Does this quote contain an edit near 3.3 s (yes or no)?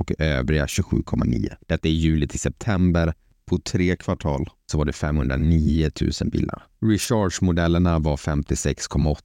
no